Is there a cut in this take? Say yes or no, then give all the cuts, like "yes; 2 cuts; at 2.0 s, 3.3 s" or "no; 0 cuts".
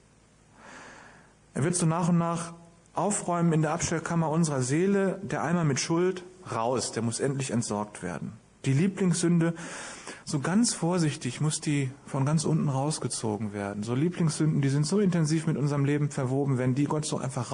no; 0 cuts